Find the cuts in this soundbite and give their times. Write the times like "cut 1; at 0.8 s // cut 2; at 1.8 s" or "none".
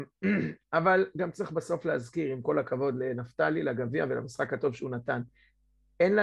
none